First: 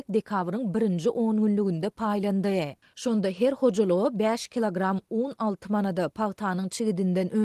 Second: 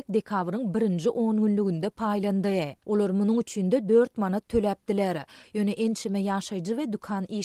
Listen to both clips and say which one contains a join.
second; 2 cuts; at 2.8 s, 5.4 s

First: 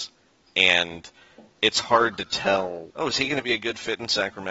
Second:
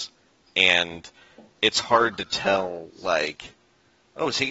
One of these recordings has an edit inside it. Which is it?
first; 1 cut; at 2.9 s

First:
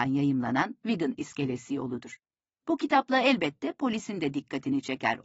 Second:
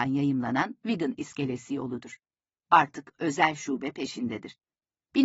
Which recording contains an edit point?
second; 1 cut; at 2.5 s

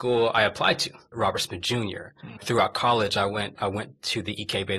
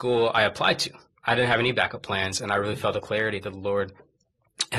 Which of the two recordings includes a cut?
first; 2 cuts; at 1.1 s, 2.4 s

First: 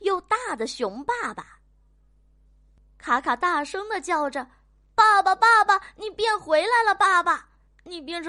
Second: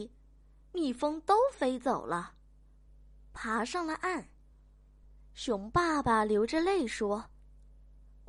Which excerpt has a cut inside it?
second; 1 cut; at 4.5 s

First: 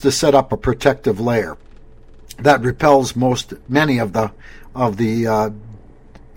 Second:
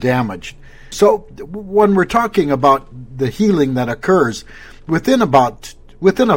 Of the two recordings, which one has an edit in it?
second; 1 cut; at 0.9 s

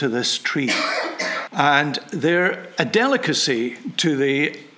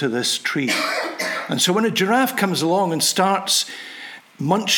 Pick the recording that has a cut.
first; 1 cut; at 1.5 s

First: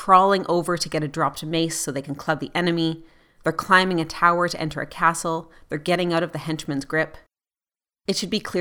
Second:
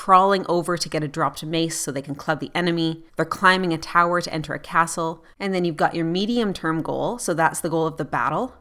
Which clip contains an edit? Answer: second; 2 cuts; at 3.1 s, 5.3 s

